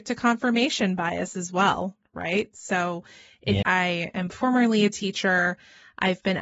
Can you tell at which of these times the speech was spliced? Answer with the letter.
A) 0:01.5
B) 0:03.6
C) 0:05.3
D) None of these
B